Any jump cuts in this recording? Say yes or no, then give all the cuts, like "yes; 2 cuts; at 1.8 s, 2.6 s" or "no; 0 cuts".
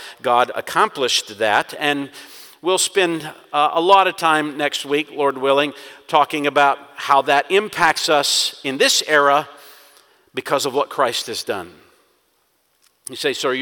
no; 0 cuts